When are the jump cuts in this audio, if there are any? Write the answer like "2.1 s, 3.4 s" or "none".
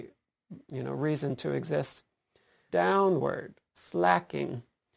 2.7 s